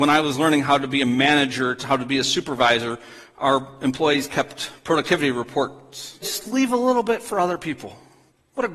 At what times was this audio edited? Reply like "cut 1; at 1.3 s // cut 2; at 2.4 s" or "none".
cut 1; at 6.2 s